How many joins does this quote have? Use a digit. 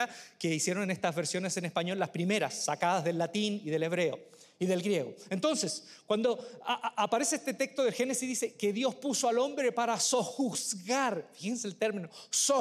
0